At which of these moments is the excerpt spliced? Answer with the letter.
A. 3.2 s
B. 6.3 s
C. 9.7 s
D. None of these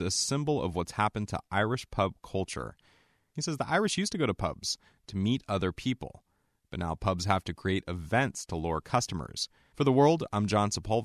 C